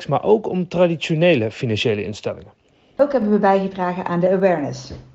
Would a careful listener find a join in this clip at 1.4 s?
no; 1 cut; at 3.0 s

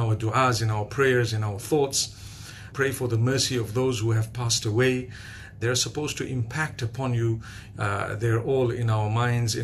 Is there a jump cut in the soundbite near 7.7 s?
yes; 3 cuts; at 2.7 s, 5.6 s, 7.7 s

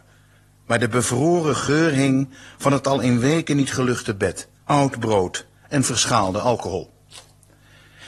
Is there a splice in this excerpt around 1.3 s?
no; 1 cut; at 4.6 s

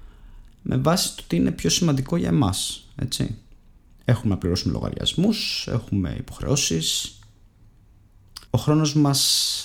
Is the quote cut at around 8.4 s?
yes; 1 cut; at 8.4 s

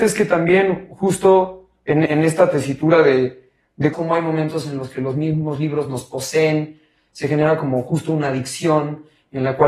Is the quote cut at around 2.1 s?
yes; 2 cuts; at 2.1 s, 3.9 s

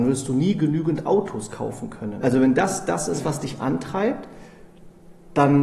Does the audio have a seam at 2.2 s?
yes; 1 cut; at 2.2 s

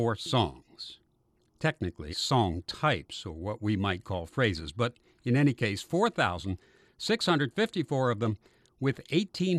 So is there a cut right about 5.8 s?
no; 1 cut; at 2.1 s

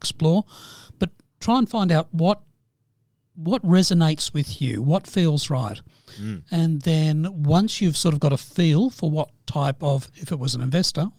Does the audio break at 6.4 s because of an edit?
no; 0 cuts

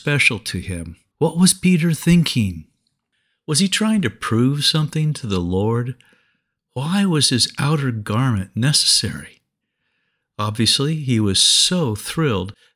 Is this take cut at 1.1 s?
yes; 1 cut; at 1.1 s

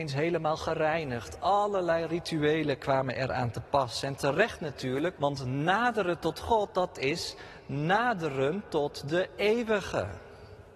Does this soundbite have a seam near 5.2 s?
yes; 1 cut; at 5.2 s

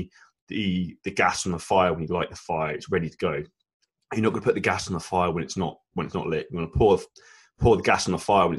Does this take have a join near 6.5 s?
no; 0 cuts

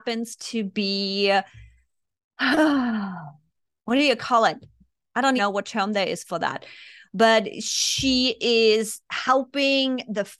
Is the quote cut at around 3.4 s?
no; 1 cut; at 5.4 s

